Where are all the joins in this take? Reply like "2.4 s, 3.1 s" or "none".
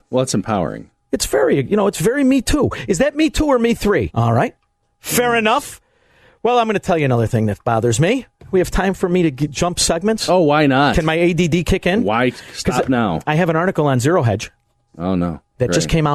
4.1 s